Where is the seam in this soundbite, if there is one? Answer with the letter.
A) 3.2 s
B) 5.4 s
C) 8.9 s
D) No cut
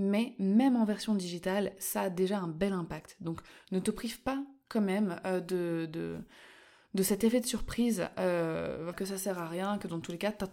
C